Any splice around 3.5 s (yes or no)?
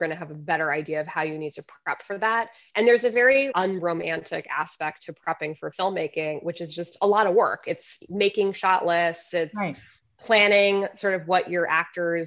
yes